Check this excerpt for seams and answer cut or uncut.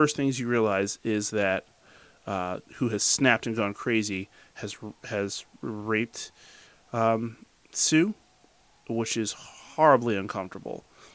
cut